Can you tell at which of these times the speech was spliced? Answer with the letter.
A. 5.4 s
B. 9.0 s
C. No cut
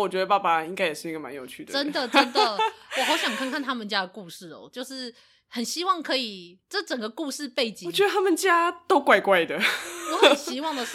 C